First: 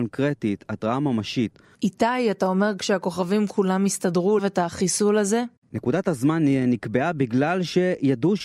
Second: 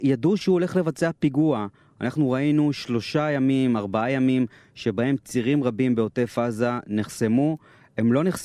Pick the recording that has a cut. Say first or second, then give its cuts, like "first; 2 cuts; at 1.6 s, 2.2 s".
first; 2 cuts; at 1.7 s, 4.4 s